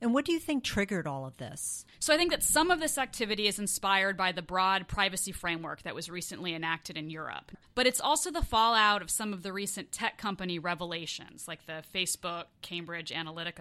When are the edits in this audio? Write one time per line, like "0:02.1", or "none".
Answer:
none